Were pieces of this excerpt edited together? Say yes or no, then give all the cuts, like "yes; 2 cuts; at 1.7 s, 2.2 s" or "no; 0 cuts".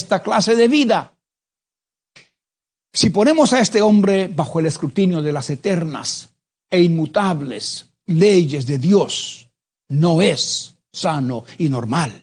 no; 0 cuts